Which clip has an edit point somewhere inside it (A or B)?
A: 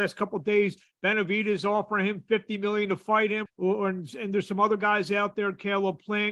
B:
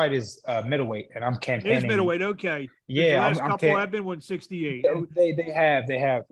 A